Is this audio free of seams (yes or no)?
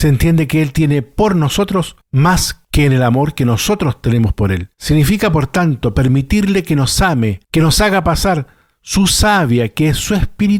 yes